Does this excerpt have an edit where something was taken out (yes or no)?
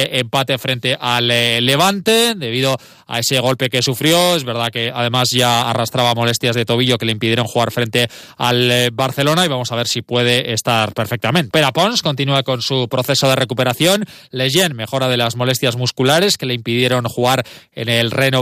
yes